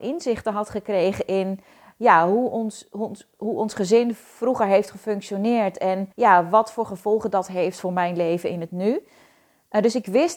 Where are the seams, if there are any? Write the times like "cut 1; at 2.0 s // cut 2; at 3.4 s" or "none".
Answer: cut 1; at 6.1 s